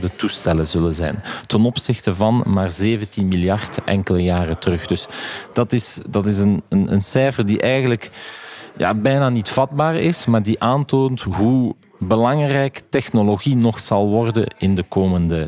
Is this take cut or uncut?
uncut